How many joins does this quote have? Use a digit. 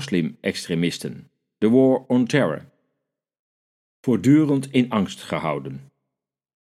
1